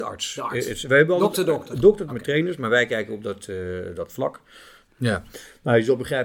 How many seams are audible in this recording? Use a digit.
2